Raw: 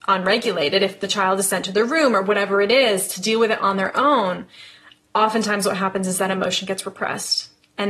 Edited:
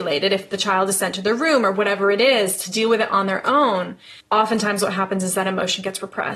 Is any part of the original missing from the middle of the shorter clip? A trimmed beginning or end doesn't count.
yes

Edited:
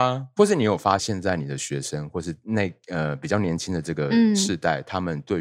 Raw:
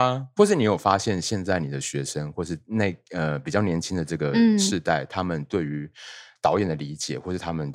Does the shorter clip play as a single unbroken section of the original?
no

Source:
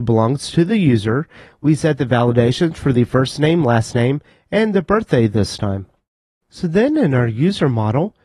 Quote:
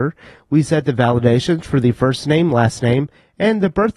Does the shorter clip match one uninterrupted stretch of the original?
yes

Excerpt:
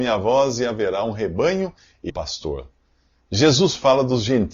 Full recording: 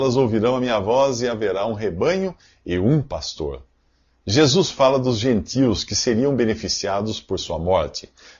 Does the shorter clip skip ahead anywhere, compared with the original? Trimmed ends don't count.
yes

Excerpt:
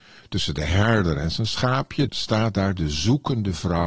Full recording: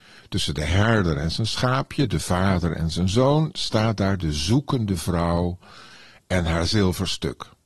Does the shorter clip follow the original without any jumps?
no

